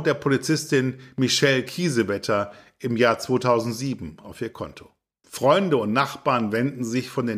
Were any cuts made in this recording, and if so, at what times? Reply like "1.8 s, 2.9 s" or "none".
5.2 s